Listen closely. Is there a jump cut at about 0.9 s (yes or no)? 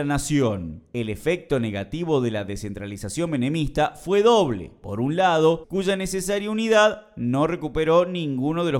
no